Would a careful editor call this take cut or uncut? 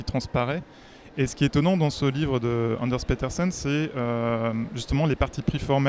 cut